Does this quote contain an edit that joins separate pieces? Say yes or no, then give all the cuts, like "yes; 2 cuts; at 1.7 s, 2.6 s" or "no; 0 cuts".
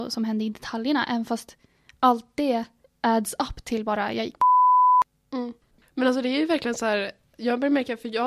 no; 0 cuts